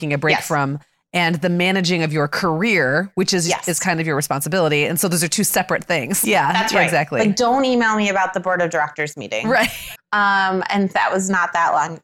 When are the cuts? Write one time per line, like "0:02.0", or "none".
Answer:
0:06.2
0:10.0

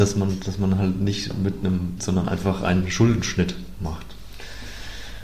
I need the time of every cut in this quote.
0:02.0

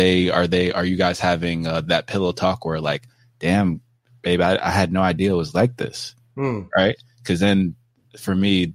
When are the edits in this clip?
none

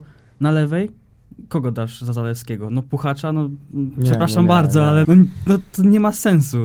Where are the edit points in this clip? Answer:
0:05.0

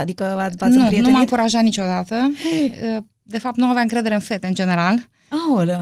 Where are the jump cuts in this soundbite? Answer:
none

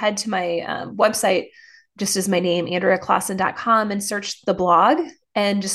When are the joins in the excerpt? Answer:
none

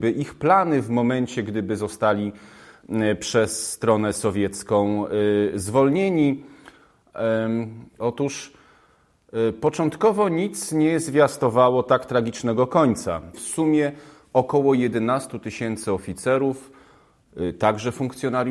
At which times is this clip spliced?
0:08.0
0:13.3

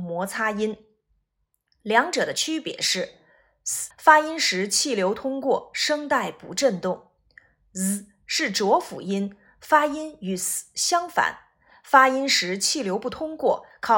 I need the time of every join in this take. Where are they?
0:03.9

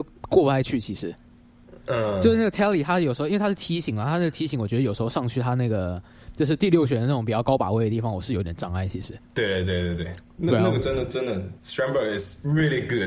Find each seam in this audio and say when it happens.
0:09.3

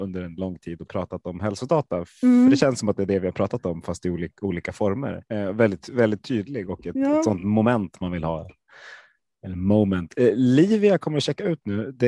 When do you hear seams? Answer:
0:05.2

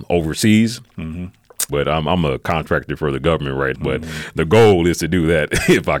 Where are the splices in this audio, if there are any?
0:01.7
0:03.7

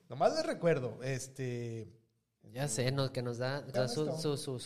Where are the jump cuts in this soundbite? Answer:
0:02.4
0:03.7

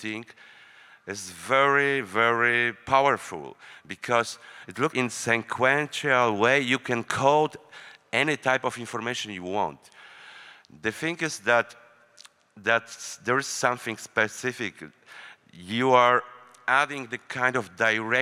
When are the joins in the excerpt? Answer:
0:04.9

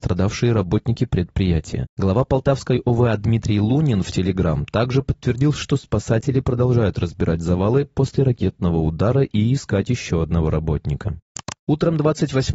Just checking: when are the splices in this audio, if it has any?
0:05.5

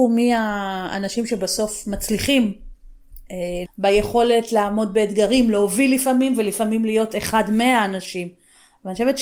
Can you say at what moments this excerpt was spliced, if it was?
0:03.6

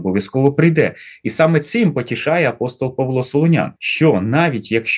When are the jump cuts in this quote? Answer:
0:03.8

